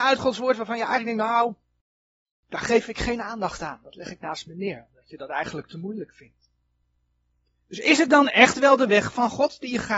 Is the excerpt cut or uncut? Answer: uncut